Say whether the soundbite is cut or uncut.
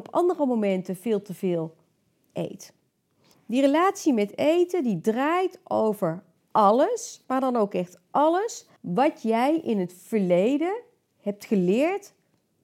cut